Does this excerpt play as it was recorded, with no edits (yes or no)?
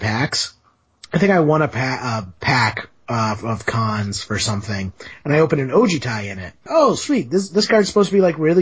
no